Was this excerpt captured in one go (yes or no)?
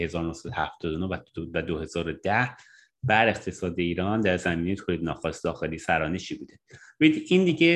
yes